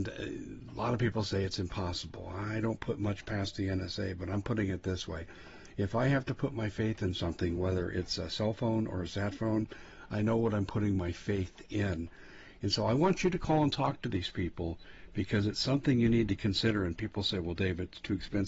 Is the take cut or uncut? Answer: uncut